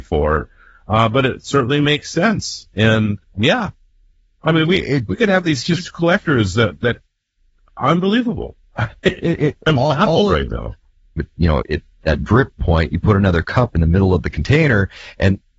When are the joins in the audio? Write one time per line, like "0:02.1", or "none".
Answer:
0:11.2